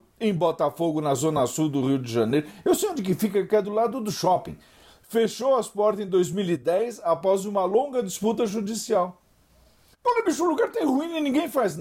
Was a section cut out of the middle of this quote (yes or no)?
no